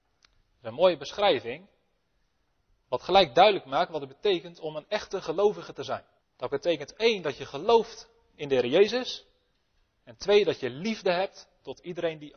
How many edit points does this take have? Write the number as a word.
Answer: one